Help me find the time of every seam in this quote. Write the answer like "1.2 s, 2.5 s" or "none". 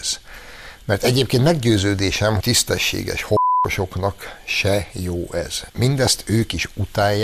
2.4 s, 5.7 s